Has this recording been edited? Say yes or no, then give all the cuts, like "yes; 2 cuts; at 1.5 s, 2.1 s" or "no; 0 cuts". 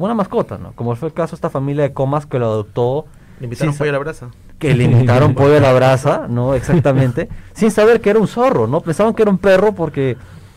no; 0 cuts